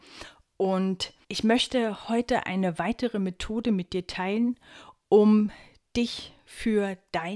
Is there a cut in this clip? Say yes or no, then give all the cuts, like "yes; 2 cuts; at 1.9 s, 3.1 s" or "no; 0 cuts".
yes; 1 cut; at 1.2 s